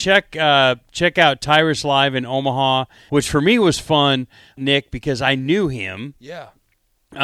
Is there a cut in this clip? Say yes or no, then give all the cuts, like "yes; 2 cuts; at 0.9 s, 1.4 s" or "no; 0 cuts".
yes; 2 cuts; at 3.1 s, 4.6 s